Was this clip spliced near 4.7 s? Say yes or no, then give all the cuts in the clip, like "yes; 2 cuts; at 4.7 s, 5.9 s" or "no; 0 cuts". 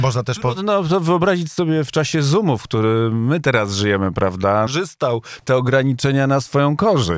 yes; 1 cut; at 4.7 s